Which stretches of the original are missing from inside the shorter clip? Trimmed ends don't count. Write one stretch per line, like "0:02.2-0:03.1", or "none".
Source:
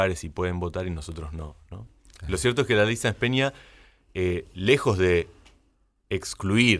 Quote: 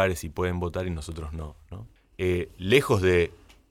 0:02.0-0:03.9

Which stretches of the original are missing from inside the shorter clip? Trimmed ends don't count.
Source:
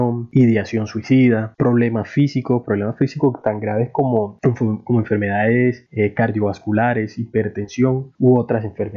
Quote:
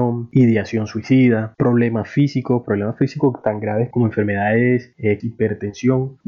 0:03.9-0:04.8
0:06.1-0:07.1

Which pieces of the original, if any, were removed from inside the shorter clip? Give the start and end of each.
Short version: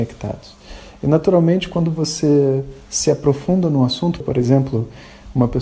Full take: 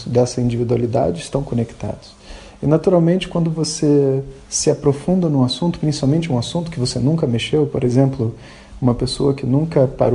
0:05.8-0:07.7

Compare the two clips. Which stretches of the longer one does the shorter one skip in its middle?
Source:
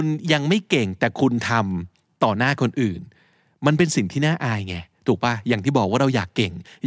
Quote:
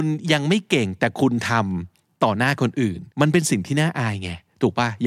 0:03.1-0:03.6

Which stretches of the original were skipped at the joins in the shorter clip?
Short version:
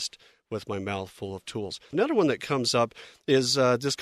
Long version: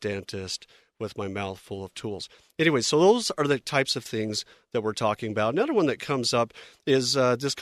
0:02.4-0:05.5

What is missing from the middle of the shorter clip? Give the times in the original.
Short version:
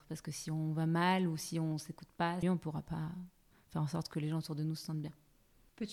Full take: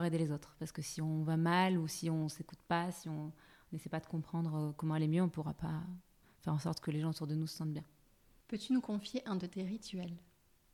0:02.9-0:05.1

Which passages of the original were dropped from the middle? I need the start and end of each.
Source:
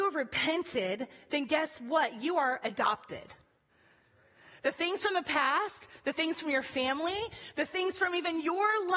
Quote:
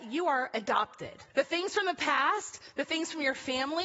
0:03.4-0:04.6

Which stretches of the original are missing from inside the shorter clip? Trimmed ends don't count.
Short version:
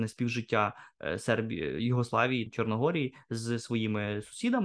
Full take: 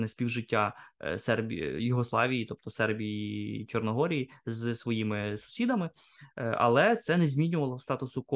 0:02.5-0:03.6

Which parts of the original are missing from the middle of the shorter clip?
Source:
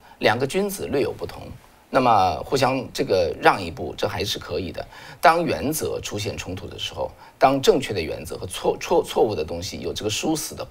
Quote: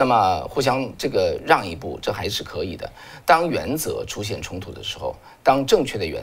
none

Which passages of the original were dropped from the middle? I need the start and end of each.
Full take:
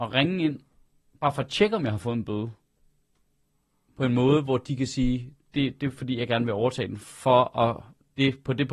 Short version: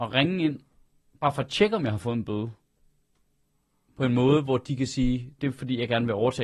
0:05.4-0:05.8

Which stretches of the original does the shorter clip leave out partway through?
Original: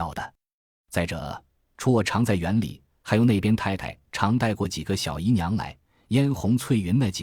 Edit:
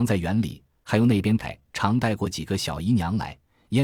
0:03.6-0:03.8

